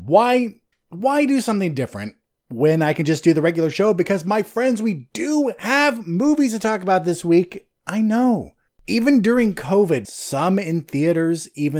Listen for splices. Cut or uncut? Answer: cut